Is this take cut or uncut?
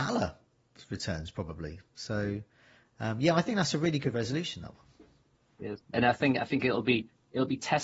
uncut